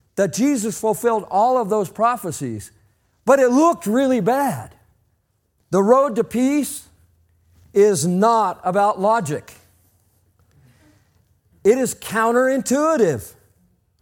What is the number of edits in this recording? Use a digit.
1